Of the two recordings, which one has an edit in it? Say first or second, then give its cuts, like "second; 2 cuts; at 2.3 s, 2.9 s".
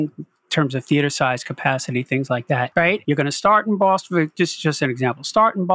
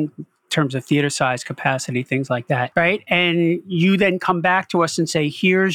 first; 1 cut; at 3.0 s